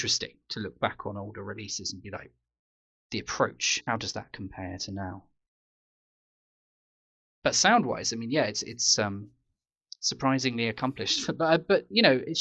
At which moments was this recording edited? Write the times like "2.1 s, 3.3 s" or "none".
none